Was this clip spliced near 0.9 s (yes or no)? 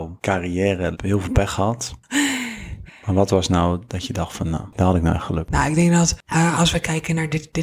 yes